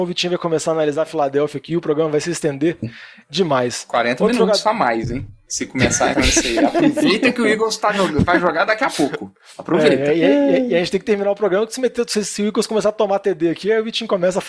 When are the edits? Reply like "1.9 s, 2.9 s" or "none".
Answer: 6.1 s